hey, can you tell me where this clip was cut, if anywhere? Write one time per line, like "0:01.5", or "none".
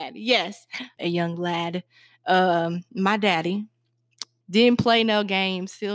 0:01.0
0:04.4